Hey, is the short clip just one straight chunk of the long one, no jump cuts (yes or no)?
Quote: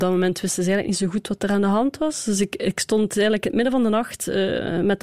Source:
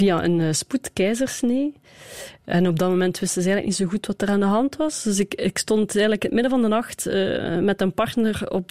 yes